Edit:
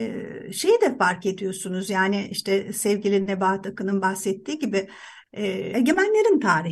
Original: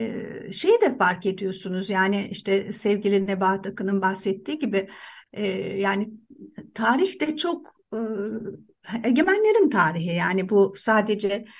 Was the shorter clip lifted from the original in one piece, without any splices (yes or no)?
no